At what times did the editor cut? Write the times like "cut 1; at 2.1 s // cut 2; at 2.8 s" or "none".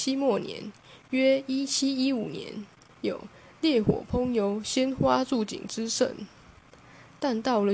cut 1; at 3.0 s

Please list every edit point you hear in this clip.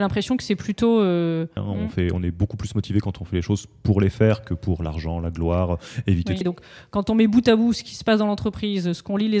cut 1; at 1.6 s // cut 2; at 6.4 s

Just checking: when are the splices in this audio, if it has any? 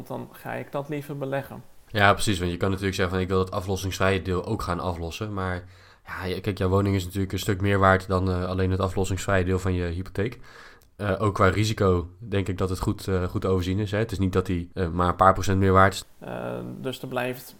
cut 1; at 16.0 s

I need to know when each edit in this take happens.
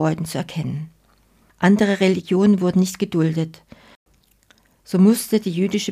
cut 1; at 1.5 s

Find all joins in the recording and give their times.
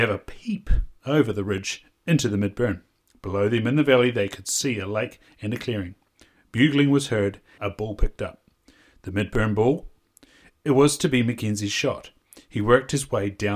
cut 1; at 7.6 s

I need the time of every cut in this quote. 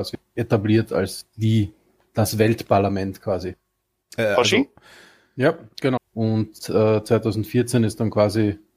cut 1; at 4.0 s // cut 2; at 6.0 s

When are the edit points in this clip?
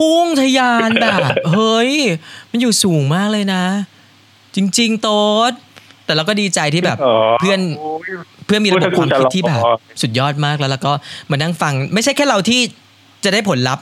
none

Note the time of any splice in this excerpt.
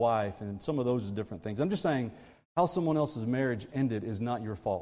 none

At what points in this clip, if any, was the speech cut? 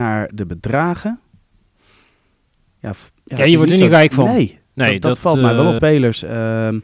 cut 1; at 5.8 s

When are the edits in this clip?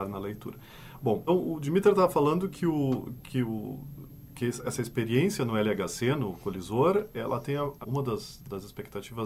cut 1; at 1.3 s // cut 2; at 7.8 s

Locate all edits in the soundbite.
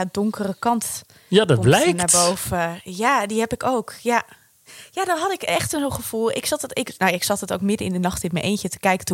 none

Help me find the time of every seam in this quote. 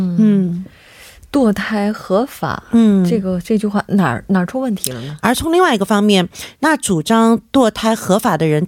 cut 1; at 5.2 s

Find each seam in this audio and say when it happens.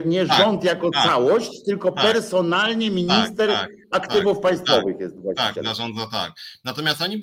none

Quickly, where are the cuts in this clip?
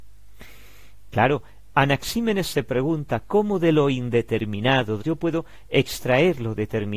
cut 1; at 1.1 s // cut 2; at 5.0 s

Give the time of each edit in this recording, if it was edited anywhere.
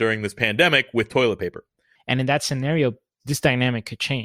cut 1; at 2.0 s

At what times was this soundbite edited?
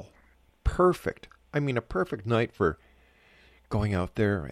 none

